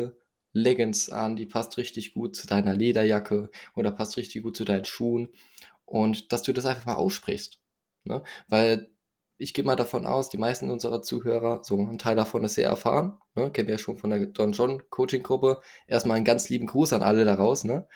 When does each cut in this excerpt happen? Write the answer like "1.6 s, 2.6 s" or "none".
none

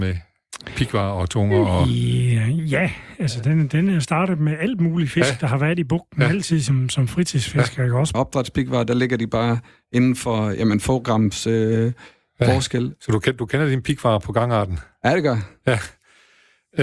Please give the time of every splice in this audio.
8.1 s

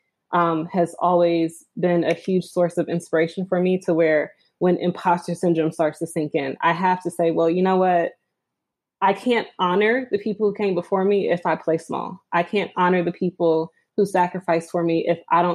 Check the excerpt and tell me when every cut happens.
none

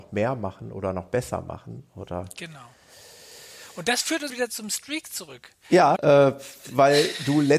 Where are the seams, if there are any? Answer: 4.3 s, 6.0 s

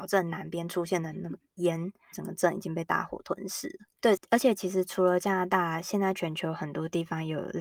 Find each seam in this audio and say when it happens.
2.1 s, 3.9 s

